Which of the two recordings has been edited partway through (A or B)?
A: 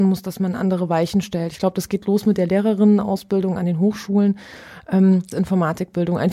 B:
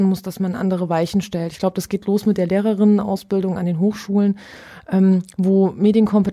A